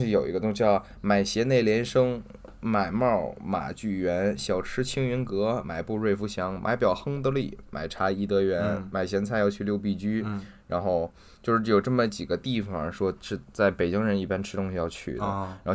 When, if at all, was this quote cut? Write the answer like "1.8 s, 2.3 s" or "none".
none

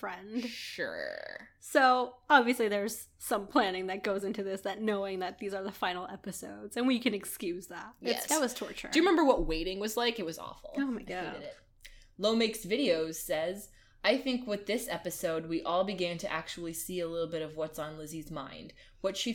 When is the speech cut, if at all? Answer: 8.2 s

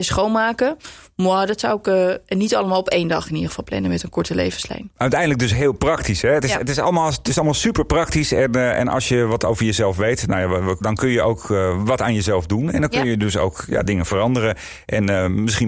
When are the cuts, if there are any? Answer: 10.8 s

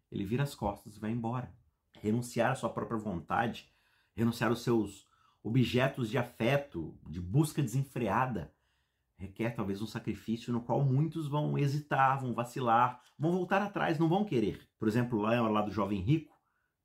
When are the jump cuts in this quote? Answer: 1.9 s, 14.7 s

